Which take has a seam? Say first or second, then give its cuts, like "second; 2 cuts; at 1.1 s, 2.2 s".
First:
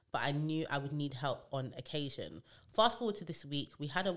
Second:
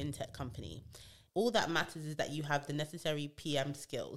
second; 1 cut; at 1.3 s